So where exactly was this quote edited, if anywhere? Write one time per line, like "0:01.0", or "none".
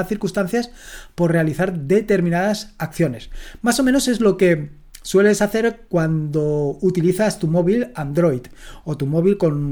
none